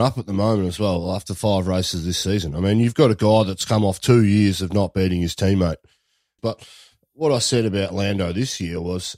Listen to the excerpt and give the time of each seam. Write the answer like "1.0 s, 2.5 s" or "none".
6.4 s